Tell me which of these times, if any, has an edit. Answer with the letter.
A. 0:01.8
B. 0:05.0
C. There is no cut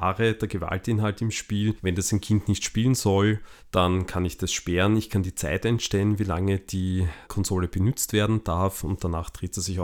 C